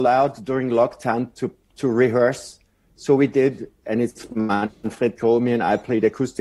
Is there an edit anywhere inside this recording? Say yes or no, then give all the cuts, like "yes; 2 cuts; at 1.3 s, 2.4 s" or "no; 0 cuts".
yes; 1 cut; at 3.8 s